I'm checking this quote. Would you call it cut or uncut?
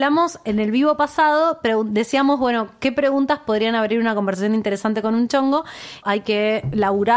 cut